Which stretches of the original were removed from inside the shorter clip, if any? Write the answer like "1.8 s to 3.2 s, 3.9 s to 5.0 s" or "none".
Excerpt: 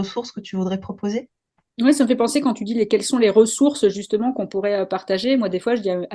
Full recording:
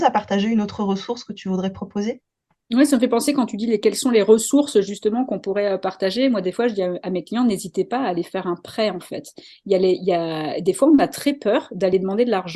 none